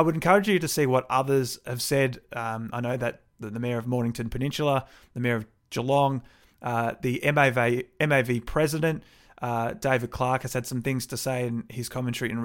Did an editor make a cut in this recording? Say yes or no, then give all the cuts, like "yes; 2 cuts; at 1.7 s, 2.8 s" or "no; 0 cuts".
no; 0 cuts